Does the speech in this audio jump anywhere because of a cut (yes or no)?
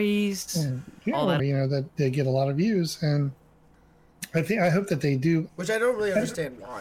yes